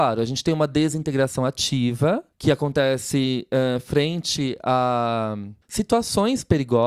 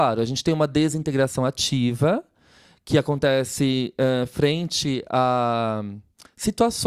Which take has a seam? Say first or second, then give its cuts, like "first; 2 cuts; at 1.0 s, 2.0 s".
first; 2 cuts; at 2.3 s, 5.6 s